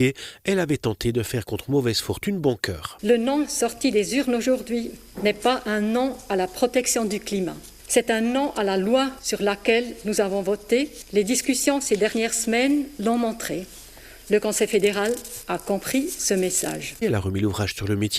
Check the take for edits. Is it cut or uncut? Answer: cut